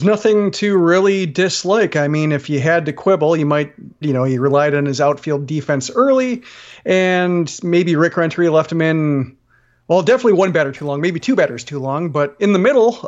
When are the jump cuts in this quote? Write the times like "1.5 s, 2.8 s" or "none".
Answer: 4.0 s